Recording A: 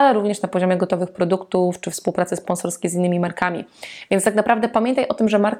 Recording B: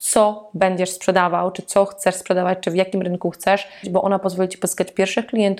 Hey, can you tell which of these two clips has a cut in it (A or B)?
B